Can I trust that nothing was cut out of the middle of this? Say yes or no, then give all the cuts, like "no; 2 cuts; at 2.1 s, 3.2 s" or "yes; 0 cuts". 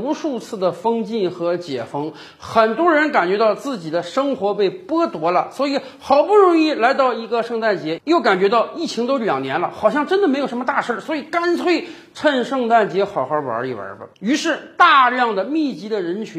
yes; 0 cuts